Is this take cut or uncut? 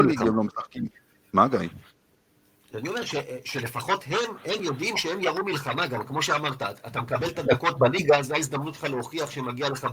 uncut